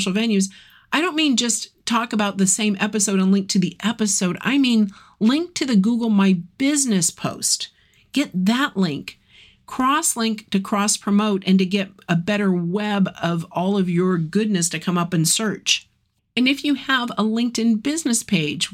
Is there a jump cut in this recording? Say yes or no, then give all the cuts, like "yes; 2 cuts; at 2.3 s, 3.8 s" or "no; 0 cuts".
no; 0 cuts